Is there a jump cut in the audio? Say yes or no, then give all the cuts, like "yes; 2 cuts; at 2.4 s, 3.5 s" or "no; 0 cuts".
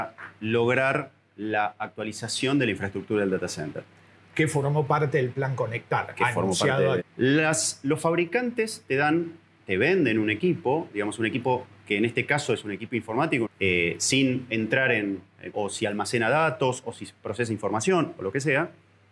yes; 3 cuts; at 7.0 s, 13.5 s, 15.5 s